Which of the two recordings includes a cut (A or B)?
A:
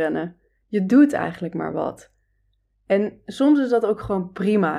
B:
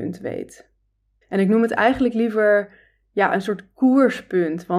B